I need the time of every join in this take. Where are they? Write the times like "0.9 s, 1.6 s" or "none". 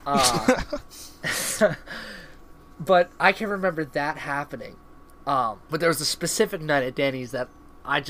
5.7 s

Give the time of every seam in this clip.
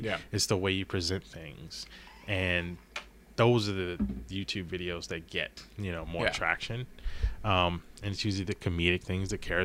none

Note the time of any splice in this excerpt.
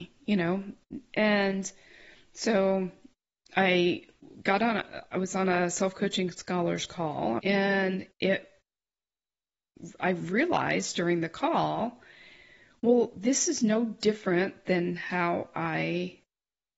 7.4 s

